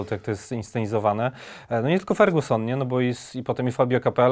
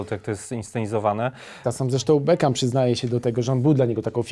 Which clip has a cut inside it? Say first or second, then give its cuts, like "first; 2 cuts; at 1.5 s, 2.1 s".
second; 1 cut; at 1.6 s